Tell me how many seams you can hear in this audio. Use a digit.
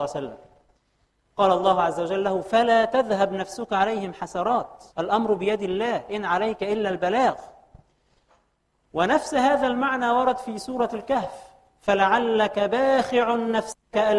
1